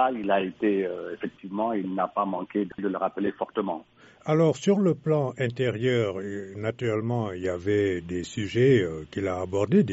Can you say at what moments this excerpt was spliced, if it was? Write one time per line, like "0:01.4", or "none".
none